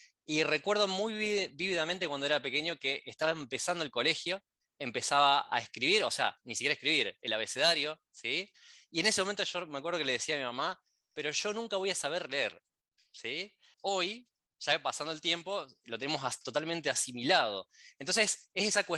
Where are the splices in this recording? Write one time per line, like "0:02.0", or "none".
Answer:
0:13.7